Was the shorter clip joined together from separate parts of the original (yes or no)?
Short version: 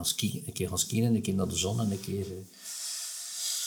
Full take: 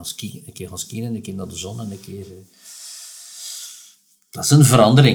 no